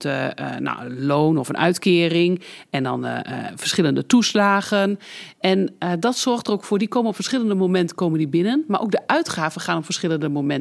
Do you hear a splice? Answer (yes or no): no